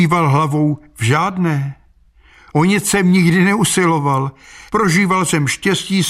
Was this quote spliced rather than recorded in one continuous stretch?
yes; 1 cut; at 4.7 s

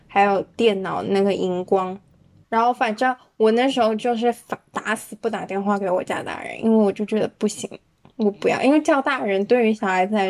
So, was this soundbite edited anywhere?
yes; 1 cut; at 2.4 s

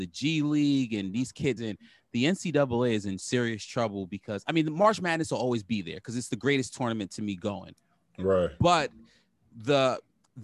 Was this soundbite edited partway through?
yes; 1 cut; at 1.6 s

